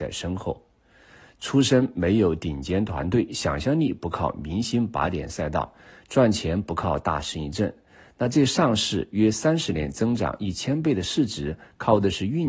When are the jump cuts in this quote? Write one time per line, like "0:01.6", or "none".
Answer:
none